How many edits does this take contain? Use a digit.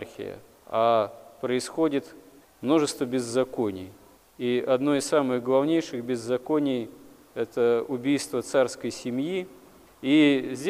0